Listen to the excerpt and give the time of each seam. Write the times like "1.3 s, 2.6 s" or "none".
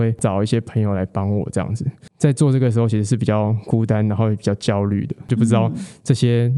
none